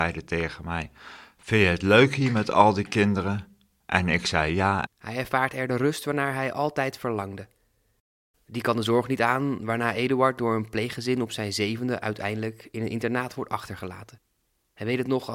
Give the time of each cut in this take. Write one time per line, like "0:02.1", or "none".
0:04.9
0:08.3